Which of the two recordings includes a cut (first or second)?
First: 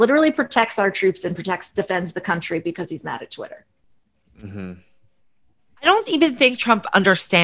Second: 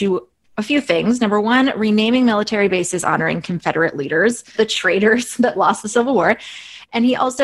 second